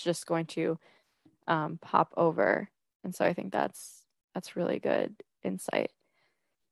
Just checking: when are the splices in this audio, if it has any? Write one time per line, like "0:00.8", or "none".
none